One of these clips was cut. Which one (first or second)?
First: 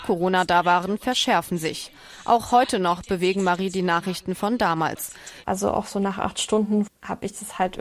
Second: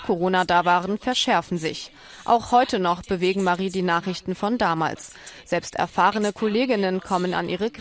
first